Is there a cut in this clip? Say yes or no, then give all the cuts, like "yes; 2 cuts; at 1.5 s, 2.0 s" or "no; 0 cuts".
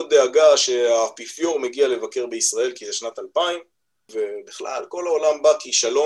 yes; 1 cut; at 4.1 s